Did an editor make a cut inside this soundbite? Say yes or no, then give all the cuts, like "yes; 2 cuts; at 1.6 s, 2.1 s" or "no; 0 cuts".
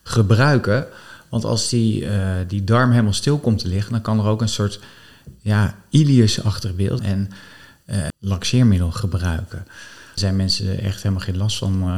yes; 3 cuts; at 7.0 s, 8.1 s, 10.2 s